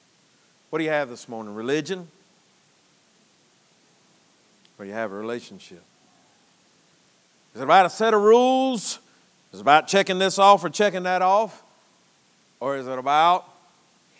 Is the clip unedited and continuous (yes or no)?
yes